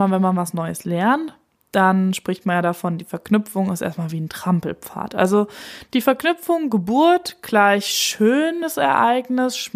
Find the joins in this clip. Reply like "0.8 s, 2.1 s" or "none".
none